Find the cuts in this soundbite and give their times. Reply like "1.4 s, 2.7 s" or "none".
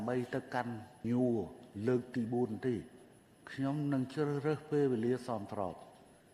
1.0 s